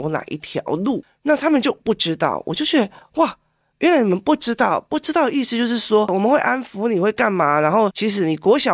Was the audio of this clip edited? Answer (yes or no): no